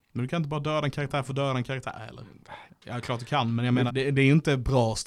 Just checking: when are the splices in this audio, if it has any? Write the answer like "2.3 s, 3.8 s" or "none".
2.7 s, 3.9 s